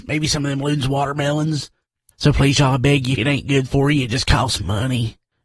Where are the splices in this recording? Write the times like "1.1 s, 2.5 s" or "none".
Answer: 2.1 s, 3.2 s